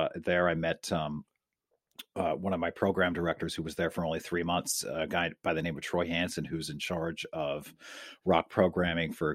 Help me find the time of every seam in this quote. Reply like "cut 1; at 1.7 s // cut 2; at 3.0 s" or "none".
none